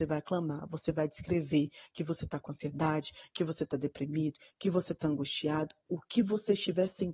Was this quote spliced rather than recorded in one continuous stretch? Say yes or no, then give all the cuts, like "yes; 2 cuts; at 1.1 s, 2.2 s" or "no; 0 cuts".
no; 0 cuts